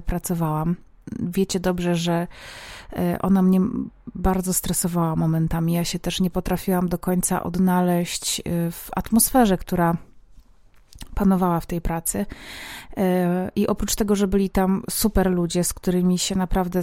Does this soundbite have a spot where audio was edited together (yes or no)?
no